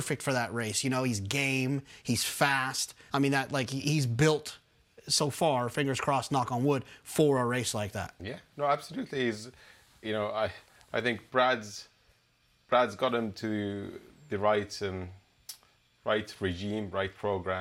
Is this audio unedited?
no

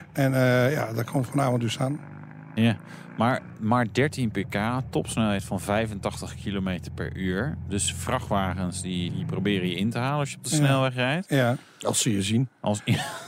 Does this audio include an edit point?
yes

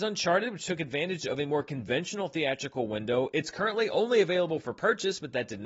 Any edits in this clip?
no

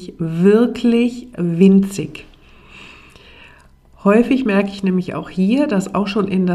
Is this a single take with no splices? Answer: yes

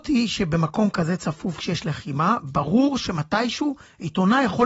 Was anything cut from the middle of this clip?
no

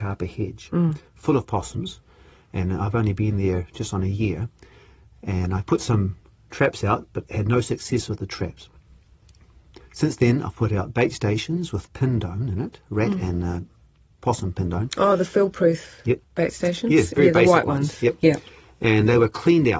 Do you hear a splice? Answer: no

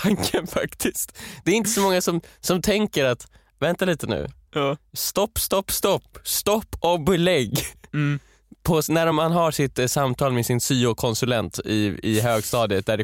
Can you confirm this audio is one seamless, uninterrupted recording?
yes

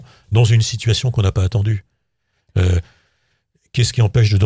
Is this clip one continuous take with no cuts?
yes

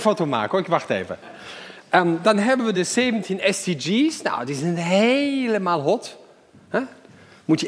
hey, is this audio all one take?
no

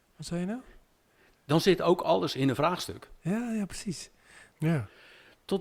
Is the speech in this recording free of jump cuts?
no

